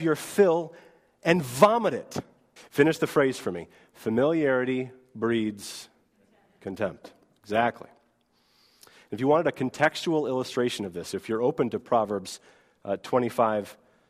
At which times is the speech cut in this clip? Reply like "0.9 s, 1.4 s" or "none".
2.6 s

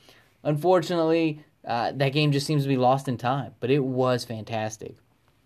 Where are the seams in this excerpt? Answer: none

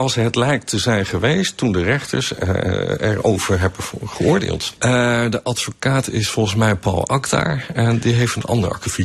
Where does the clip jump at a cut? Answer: 4.8 s

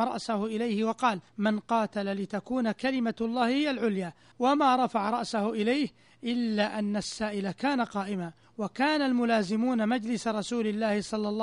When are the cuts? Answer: 4.3 s

